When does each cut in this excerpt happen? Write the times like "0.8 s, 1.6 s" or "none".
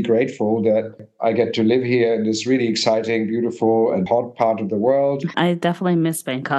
4.1 s, 5.3 s